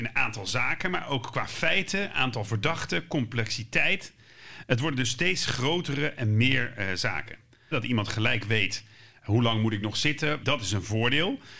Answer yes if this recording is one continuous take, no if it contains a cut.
no